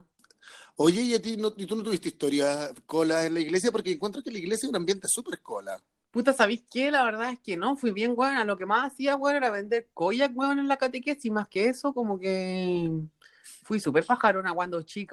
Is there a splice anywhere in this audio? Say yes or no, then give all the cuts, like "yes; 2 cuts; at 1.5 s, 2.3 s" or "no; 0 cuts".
no; 0 cuts